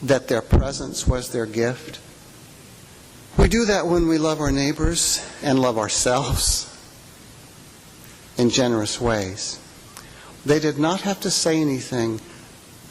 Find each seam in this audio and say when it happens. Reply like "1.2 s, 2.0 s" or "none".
3.3 s, 10.4 s